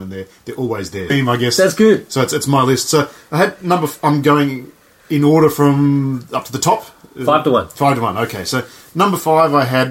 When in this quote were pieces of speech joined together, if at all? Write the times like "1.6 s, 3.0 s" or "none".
1.1 s

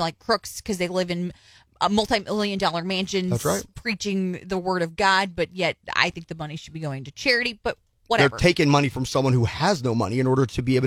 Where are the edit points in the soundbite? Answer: none

